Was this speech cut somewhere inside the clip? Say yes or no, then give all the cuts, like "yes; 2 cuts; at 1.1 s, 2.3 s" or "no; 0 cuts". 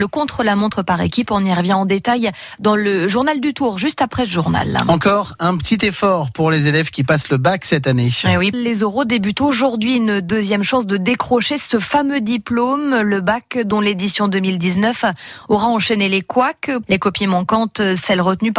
yes; 2 cuts; at 8.5 s, 16.8 s